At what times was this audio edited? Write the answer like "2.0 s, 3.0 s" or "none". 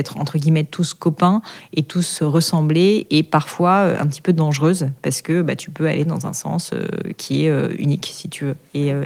none